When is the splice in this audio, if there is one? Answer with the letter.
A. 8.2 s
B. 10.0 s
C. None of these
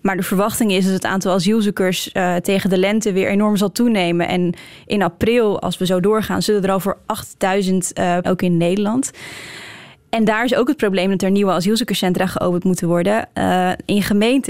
A